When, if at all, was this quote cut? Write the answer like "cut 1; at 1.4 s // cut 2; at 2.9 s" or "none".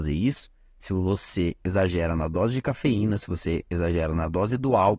none

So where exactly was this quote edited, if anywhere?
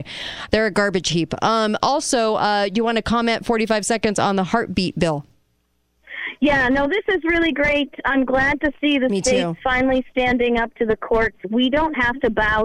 none

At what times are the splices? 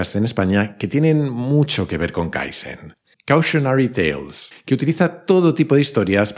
cut 1; at 3.1 s // cut 2; at 4.5 s

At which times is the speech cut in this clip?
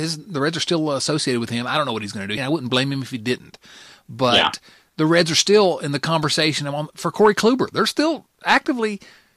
cut 1; at 2.4 s

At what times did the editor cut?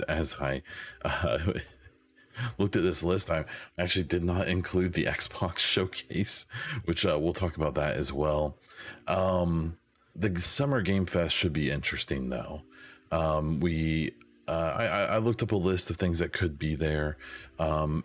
cut 1; at 10.1 s

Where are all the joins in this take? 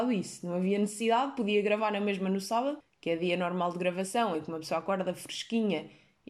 none

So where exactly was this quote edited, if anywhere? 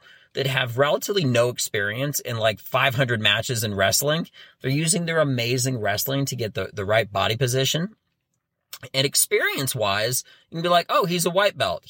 none

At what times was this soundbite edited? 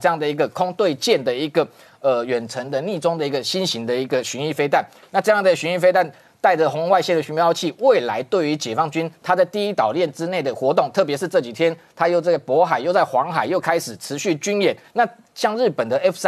cut 1; at 14.8 s

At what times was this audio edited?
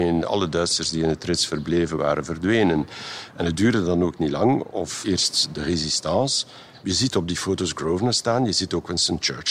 cut 1; at 6.8 s

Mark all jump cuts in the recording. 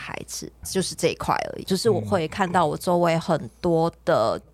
cut 1; at 1.6 s

